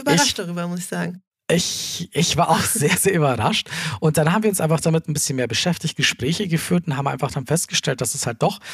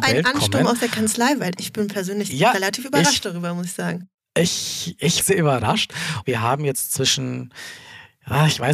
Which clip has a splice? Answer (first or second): second